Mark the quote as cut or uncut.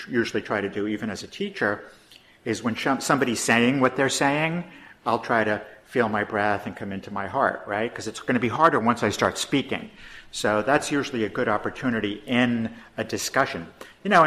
uncut